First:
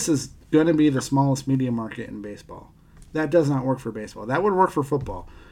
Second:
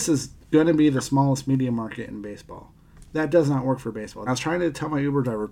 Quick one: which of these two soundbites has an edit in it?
second; 1 cut; at 4.3 s

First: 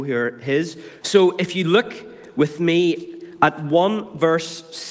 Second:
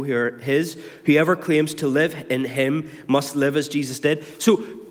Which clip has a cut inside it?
first; 1 cut; at 1.0 s

